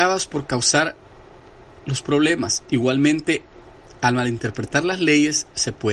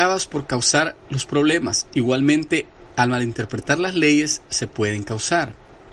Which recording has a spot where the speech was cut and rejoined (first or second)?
second